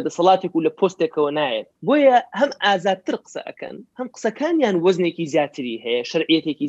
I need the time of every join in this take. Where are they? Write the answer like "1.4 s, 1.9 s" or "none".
1.8 s, 3.9 s